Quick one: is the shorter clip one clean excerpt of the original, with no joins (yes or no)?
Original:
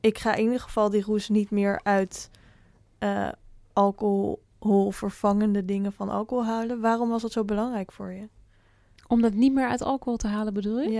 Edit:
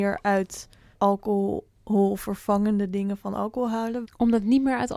no